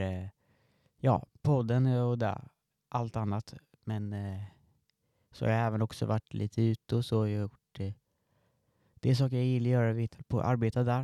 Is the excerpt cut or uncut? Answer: cut